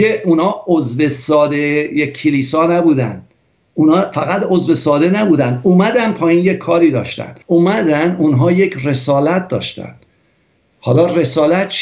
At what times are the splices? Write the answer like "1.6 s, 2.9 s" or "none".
7.4 s